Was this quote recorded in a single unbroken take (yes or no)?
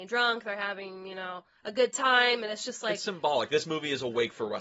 yes